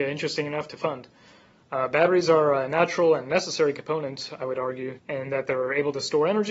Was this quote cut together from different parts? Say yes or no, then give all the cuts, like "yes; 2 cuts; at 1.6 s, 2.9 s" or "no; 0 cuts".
yes; 2 cuts; at 1.6 s, 5.0 s